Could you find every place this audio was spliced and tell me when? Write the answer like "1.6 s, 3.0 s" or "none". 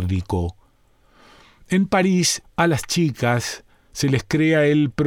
2.4 s